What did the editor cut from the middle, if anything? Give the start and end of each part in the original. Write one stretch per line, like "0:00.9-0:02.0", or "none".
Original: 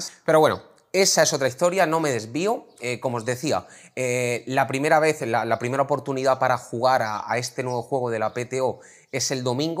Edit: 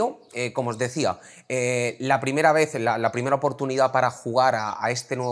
none